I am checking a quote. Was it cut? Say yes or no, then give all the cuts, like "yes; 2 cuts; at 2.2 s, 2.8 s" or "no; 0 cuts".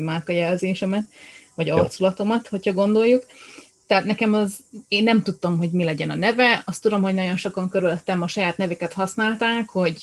no; 0 cuts